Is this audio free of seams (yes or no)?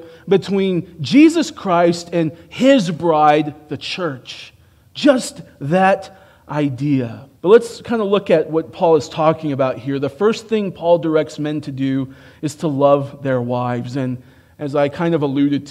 no